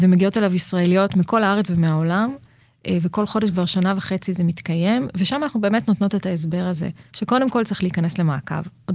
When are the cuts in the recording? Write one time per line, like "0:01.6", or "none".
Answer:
none